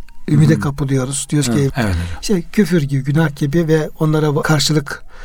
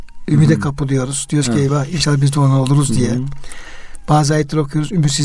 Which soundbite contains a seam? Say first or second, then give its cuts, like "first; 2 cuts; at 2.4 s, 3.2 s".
first; 1 cut; at 1.7 s